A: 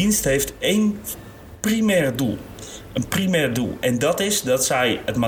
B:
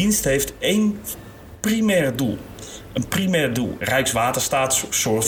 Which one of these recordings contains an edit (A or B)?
B